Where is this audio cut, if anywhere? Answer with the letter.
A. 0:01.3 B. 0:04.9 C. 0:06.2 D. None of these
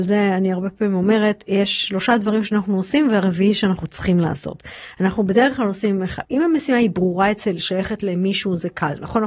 C